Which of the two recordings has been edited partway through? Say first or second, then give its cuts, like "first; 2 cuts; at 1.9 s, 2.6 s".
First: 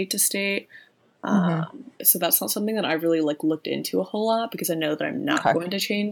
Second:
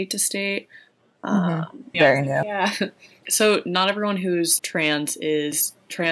second; 2 cuts; at 1.9 s, 4.6 s